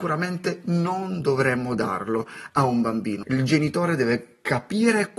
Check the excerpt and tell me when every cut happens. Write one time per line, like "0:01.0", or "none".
0:03.2